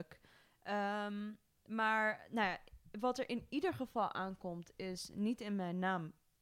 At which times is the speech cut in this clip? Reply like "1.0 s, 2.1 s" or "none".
none